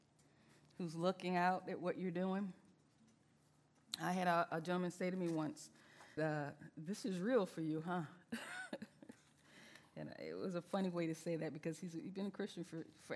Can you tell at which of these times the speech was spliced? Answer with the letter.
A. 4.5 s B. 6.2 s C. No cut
B